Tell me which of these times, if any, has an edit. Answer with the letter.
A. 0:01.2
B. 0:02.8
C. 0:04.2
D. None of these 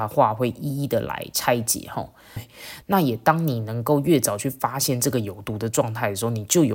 B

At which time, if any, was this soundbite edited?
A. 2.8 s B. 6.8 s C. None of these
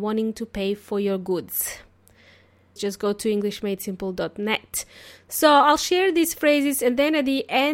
A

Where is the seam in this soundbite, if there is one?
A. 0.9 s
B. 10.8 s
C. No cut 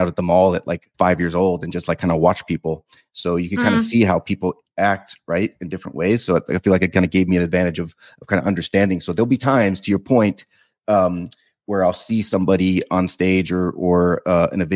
A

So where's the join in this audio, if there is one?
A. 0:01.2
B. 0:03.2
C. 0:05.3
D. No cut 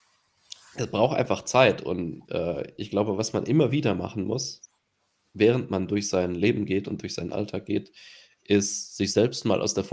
D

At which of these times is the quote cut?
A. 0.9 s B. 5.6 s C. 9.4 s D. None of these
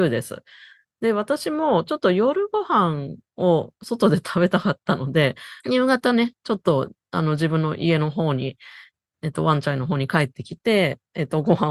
B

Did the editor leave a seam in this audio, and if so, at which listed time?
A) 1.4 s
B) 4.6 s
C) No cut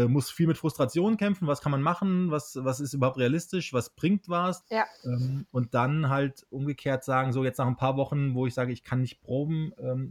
B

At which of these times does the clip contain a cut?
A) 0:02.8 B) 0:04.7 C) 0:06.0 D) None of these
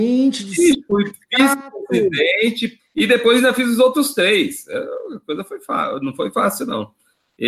A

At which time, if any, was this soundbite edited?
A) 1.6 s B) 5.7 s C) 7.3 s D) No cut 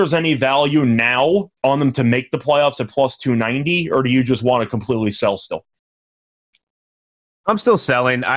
A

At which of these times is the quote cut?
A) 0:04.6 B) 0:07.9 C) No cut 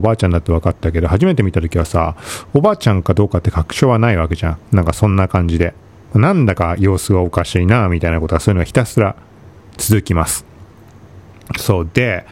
A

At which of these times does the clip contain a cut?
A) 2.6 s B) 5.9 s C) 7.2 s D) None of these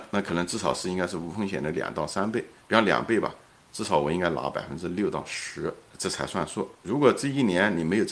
B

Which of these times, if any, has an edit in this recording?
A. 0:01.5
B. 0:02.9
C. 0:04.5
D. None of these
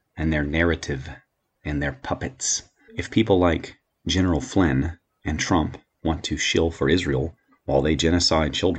B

